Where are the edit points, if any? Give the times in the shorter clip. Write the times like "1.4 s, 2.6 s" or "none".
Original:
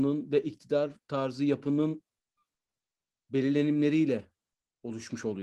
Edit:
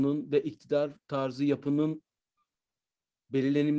none